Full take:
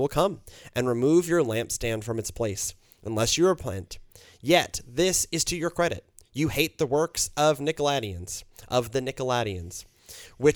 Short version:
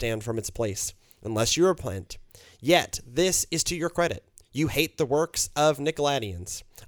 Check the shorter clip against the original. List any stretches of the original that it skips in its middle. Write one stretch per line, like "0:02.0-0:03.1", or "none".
none